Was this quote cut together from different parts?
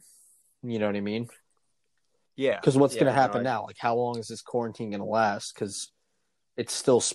no; 0 cuts

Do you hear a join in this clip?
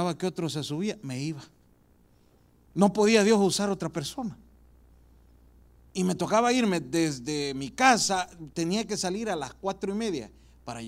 yes; 2 cuts; at 2.7 s, 5.9 s

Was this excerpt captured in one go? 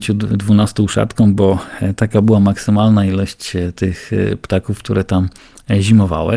yes; 0 cuts

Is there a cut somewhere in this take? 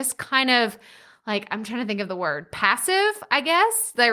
no; 0 cuts

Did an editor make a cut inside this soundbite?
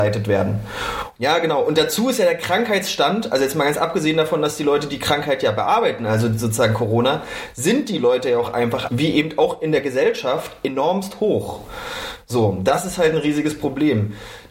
yes; 2 cuts; at 1.1 s, 8.9 s

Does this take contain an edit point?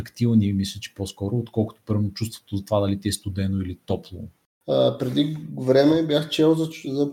yes; 1 cut; at 4.6 s

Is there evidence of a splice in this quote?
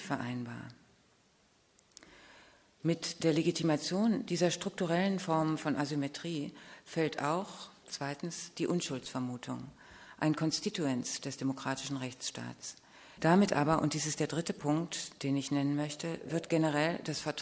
yes; 1 cut; at 13.2 s

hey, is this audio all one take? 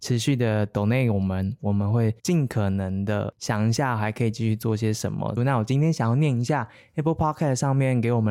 no; 2 cuts; at 2.2 s, 5.4 s

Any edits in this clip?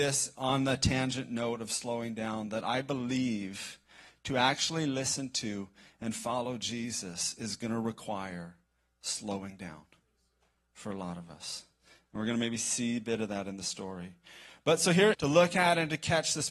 yes; 1 cut; at 15.1 s

